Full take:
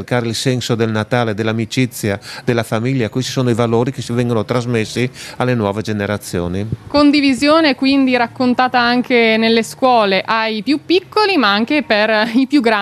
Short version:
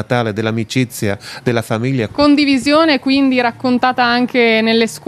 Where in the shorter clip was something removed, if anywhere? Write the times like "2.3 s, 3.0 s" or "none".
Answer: 2.1 s